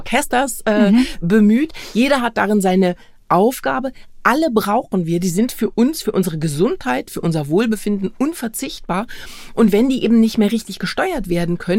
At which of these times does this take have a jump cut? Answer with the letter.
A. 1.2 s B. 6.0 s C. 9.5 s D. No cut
D